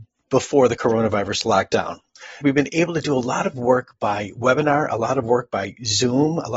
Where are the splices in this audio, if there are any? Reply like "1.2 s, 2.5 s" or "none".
2.4 s